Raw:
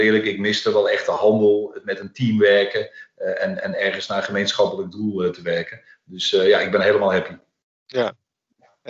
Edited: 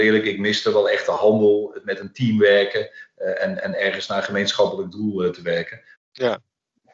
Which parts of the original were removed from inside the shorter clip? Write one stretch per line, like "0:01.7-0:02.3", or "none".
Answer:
0:06.0-0:07.7